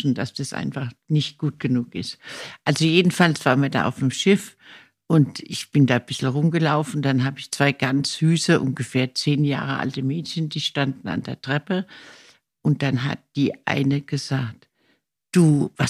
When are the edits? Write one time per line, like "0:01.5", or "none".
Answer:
none